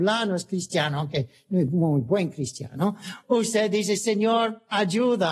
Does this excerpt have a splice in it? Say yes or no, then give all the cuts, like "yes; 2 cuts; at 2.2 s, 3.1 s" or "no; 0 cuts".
no; 0 cuts